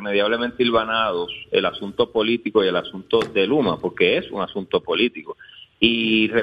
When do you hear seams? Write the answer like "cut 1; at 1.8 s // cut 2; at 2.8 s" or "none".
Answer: none